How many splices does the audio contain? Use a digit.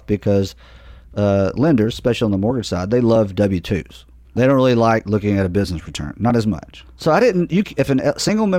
2